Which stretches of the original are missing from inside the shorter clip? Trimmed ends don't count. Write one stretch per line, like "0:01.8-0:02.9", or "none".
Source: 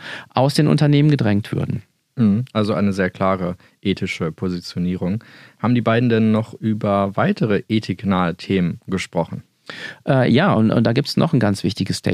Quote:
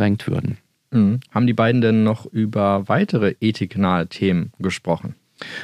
0:02.5-0:05.6